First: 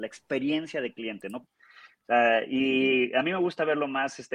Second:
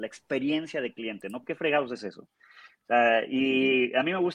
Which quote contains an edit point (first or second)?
first